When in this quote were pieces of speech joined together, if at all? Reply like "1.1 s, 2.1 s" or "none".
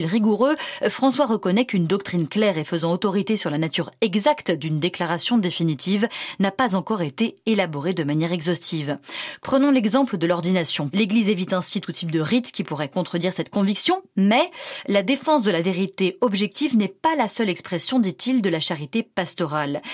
9.4 s, 10.9 s